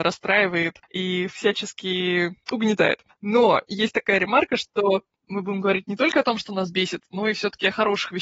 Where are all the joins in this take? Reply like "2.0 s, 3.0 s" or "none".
none